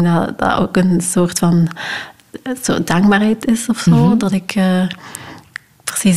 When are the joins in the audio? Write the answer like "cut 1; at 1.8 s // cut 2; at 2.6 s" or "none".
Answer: none